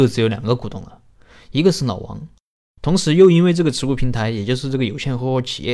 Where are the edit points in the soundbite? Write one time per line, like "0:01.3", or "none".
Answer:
0:02.6

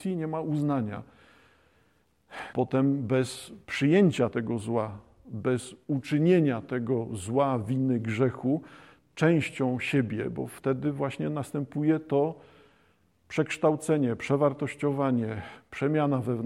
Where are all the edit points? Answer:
0:02.5

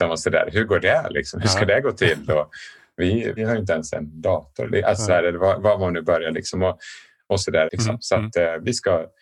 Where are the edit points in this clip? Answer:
0:03.4
0:07.7

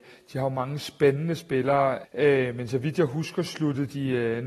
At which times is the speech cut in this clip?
0:02.0

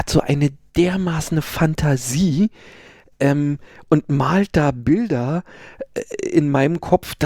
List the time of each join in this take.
none

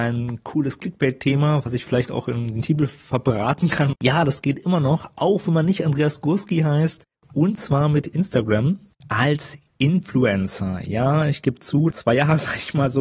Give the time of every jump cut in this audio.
0:03.9
0:11.9

